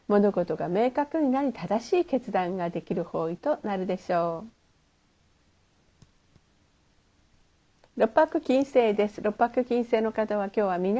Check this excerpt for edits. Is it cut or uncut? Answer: uncut